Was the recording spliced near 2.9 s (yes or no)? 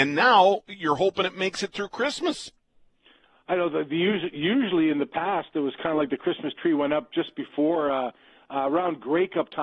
no